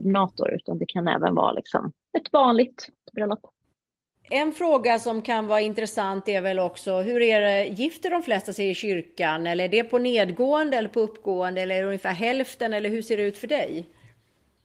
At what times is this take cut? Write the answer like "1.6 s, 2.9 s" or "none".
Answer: 2.0 s